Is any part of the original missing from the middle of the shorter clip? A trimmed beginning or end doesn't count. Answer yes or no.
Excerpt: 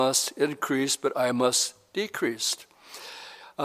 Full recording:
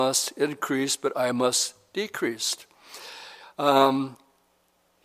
no